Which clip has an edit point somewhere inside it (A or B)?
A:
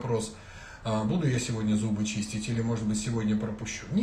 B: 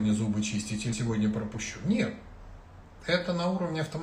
B